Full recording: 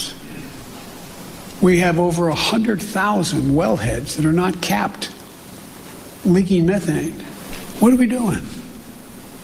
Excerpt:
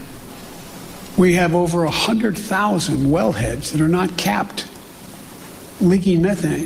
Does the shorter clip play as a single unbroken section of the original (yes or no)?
yes